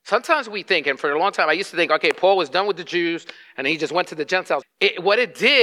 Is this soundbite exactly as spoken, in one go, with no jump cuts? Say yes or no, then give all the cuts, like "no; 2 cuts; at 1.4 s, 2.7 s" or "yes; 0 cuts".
no; 1 cut; at 4.6 s